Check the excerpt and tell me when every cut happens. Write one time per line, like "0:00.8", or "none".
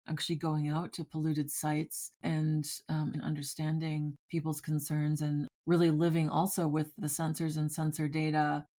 0:03.1
0:07.0